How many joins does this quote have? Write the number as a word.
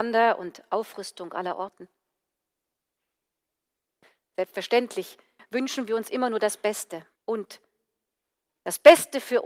two